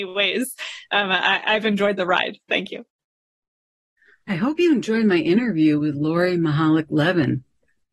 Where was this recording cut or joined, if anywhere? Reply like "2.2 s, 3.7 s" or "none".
none

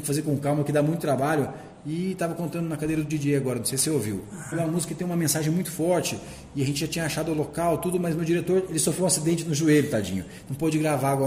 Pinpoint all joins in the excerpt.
4.5 s

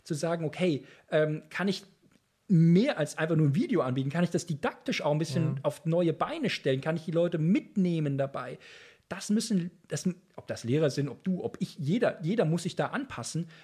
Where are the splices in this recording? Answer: none

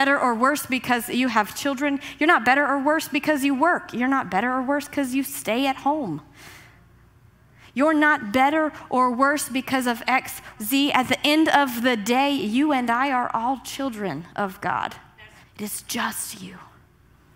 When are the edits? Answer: 10.6 s, 15.4 s

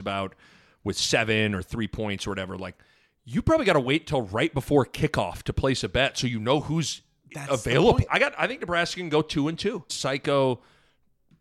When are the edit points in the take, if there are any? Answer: 8.1 s, 9.9 s

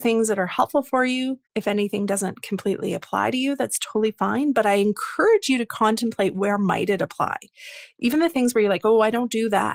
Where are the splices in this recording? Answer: 1.5 s

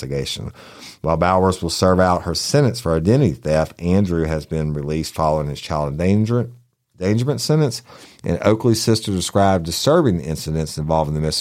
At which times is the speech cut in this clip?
none

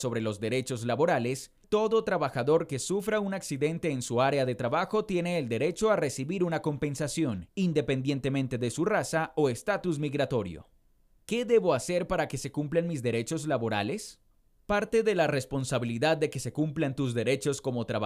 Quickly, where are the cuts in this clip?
1.6 s

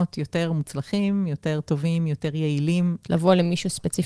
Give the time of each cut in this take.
3.0 s

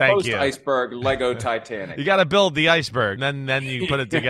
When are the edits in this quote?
3.2 s

